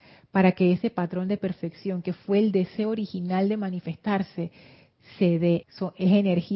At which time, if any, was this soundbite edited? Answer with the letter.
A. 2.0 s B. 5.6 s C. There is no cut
B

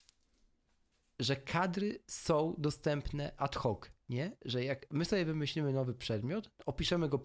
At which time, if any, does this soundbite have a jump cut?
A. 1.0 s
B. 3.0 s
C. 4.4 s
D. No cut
D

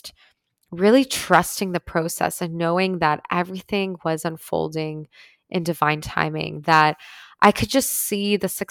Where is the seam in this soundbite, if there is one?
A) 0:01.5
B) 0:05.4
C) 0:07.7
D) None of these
D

